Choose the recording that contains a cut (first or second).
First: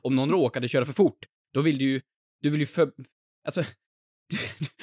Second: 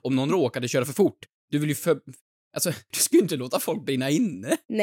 second